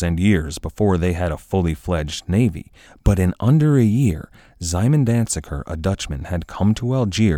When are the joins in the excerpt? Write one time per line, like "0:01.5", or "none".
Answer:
none